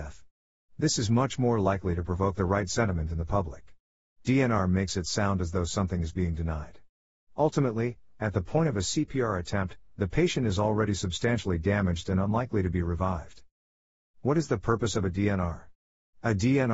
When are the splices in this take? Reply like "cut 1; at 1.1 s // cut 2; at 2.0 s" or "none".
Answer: none